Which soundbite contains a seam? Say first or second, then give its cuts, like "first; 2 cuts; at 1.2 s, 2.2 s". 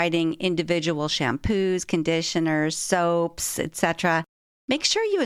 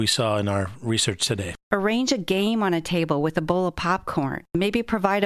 second; 1 cut; at 1.6 s